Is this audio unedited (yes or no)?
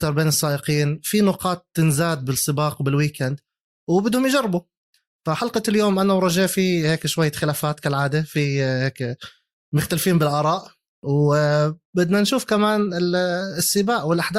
yes